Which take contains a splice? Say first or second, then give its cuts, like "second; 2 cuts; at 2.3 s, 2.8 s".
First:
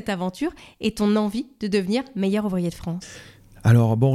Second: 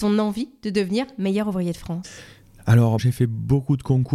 second; 1 cut; at 3.0 s